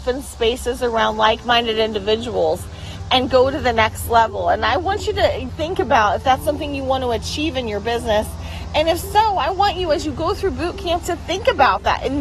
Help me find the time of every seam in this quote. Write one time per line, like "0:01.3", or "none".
0:05.5